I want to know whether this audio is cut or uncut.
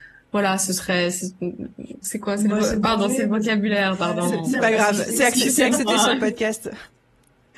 cut